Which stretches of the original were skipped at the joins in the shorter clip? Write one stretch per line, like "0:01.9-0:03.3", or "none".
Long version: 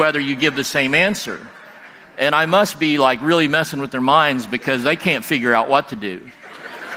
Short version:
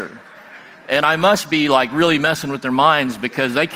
none

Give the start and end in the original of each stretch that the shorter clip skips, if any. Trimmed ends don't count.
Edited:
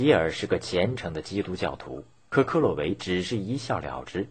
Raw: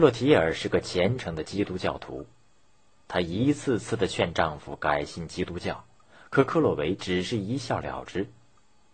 0:02.5-0:06.3

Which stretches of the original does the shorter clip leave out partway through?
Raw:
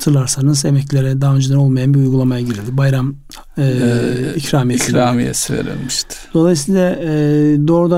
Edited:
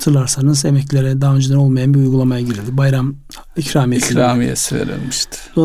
0:03.6-0:04.3

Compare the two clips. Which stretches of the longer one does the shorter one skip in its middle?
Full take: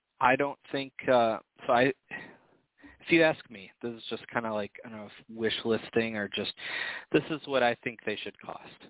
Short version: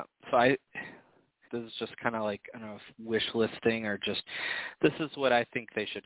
0:02.8-0:03.8

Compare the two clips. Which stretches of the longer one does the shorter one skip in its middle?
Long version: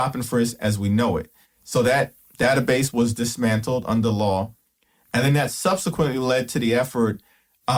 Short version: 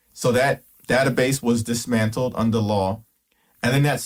none

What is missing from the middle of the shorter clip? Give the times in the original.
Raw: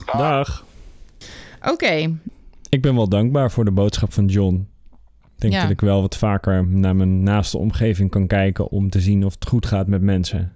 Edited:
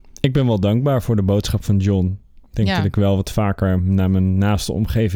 0:04.9-0:05.3

